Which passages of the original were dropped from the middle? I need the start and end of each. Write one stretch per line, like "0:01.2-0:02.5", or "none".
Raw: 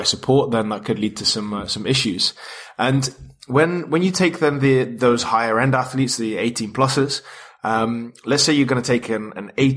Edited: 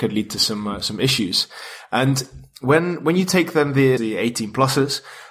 0:04.8-0:06.2